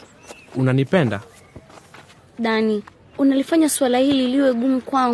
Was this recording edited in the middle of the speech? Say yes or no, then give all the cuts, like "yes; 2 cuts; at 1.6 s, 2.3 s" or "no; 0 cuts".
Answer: yes; 1 cut; at 2.2 s